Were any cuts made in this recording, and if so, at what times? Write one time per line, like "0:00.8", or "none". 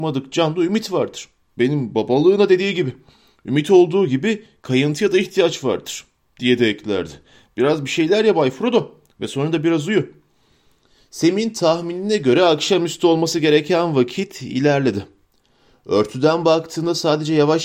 none